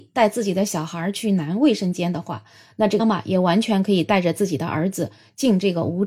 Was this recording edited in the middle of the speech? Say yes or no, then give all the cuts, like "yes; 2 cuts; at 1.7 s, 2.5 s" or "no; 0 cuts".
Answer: yes; 1 cut; at 3.0 s